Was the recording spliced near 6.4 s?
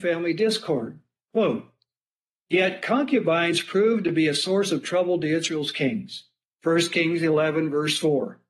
yes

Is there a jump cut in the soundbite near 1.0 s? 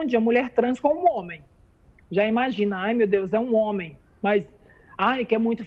no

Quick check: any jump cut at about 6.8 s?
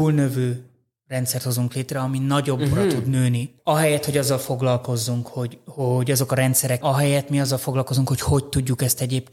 yes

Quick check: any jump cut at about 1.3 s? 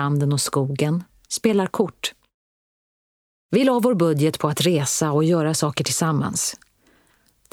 yes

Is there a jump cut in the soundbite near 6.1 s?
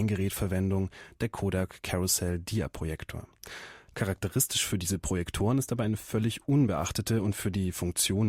no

